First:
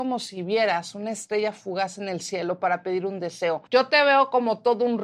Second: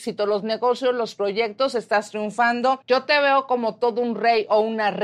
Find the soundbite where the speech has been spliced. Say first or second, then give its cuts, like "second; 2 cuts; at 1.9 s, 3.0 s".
first; 1 cut; at 3.7 s